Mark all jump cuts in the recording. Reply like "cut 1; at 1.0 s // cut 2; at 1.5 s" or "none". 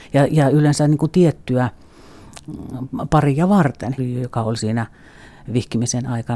cut 1; at 4.0 s